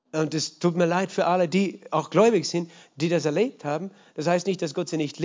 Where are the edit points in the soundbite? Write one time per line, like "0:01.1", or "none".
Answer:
none